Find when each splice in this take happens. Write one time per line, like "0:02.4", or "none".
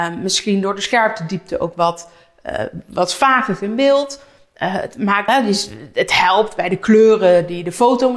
0:05.3